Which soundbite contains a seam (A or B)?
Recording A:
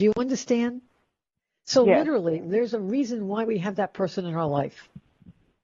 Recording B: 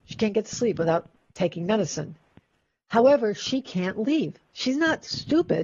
A